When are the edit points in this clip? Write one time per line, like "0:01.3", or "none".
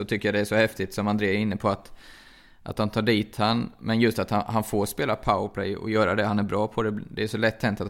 none